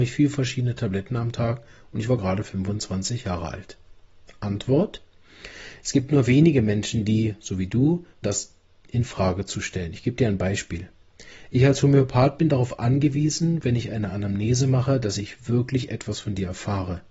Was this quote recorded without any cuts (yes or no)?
no